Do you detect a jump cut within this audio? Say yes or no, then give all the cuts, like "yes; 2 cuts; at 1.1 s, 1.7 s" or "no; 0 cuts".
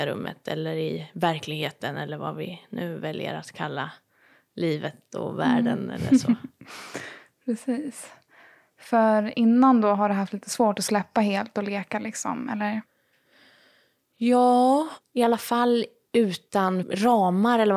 no; 0 cuts